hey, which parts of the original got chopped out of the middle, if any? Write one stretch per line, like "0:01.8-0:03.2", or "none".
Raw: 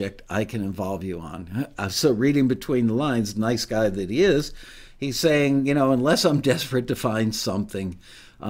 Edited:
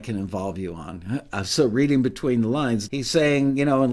0:03.3-0:05.0